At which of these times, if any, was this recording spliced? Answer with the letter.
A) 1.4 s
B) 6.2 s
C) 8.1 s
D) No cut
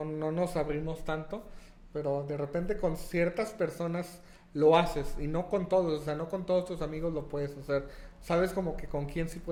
D